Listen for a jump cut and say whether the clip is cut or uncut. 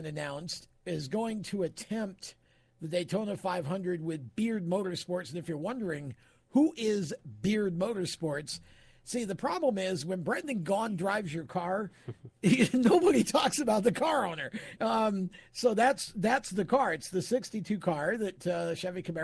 uncut